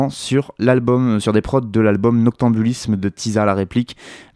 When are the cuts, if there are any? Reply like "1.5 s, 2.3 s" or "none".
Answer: none